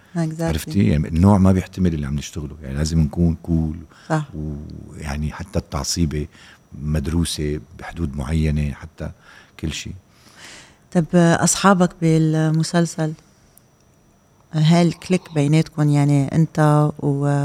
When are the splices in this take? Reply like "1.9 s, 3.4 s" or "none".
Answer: none

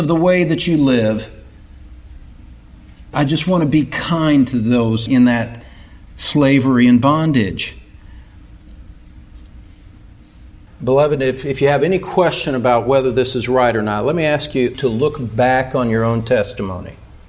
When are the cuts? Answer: 10.7 s

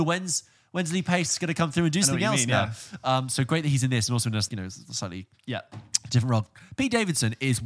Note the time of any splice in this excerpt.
4.5 s

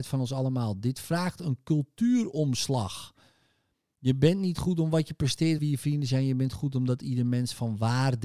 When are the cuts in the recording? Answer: 5.6 s

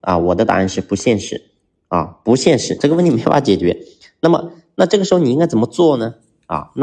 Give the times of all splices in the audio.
2.8 s

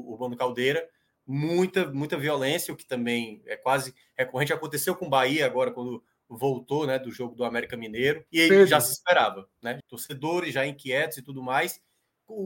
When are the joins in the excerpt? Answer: 8.3 s, 9.8 s

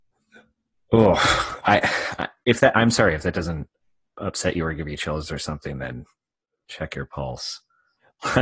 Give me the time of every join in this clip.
none

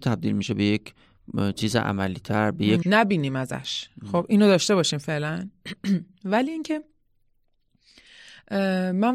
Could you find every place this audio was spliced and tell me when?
2.8 s

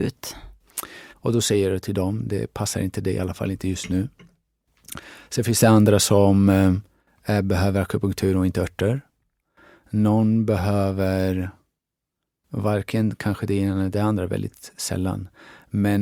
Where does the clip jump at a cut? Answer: 1.1 s

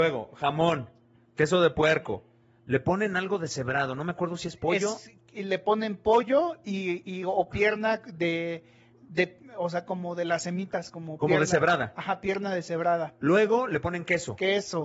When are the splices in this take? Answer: none

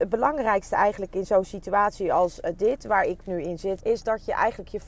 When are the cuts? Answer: 3.8 s

